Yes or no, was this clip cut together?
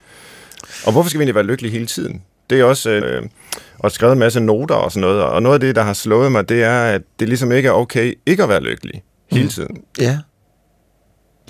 yes